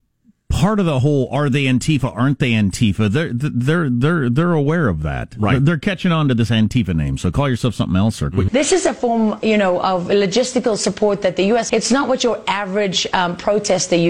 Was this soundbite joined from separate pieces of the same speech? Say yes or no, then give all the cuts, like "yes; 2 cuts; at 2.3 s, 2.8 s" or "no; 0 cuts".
yes; 2 cuts; at 8.5 s, 11.7 s